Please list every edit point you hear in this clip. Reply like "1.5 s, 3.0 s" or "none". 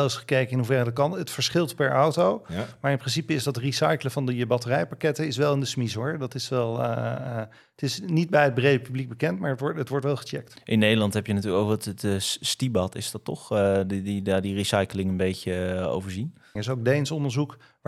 16.6 s